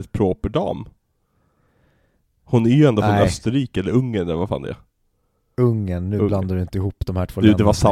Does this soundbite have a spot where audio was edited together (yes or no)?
no